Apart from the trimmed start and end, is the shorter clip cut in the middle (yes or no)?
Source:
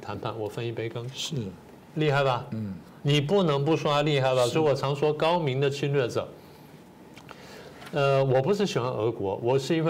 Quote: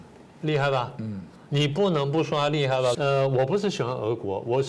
yes